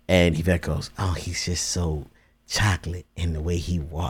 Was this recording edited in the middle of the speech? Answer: no; 0 cuts

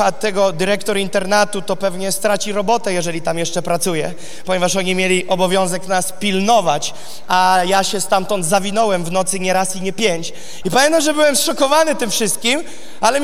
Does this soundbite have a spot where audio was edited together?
yes; 1 cut; at 10.6 s

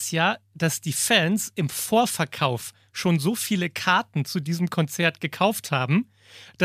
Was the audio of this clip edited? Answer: no; 0 cuts

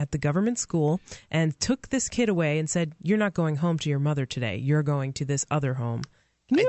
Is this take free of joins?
yes; 0 cuts

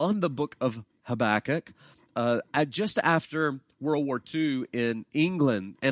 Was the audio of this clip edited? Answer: no; 0 cuts

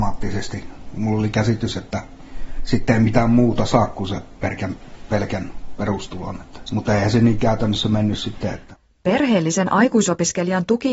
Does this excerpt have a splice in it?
no; 0 cuts

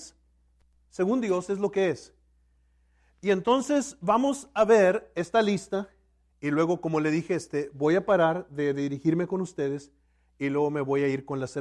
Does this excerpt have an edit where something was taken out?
yes; 1 cut; at 6.3 s

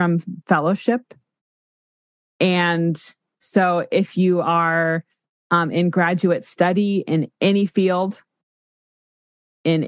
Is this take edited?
no; 0 cuts

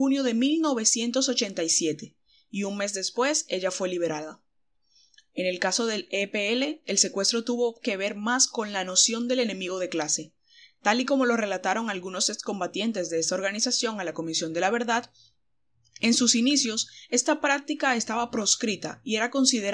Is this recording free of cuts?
yes; 0 cuts

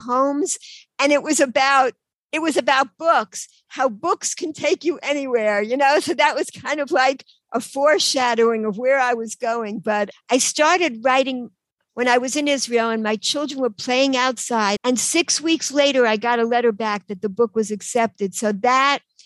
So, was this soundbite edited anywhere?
yes; 2 cuts; at 10.1 s, 14.8 s

